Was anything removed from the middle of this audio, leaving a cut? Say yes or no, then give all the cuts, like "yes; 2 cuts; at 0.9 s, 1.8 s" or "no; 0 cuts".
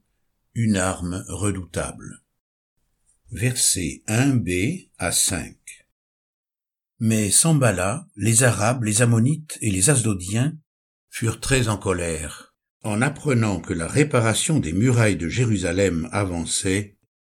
yes; 1 cut; at 8.1 s